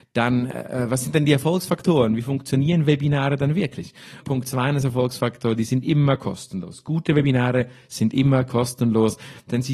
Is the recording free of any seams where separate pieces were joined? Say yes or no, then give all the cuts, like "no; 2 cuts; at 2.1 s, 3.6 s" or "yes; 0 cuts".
no; 1 cut; at 4.2 s